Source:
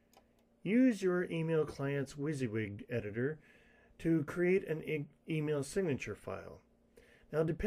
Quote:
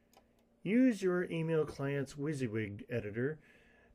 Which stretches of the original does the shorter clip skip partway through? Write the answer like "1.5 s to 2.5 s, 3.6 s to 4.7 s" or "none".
none